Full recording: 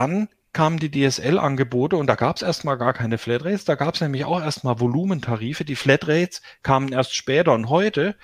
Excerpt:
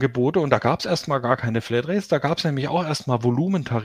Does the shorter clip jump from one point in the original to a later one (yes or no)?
no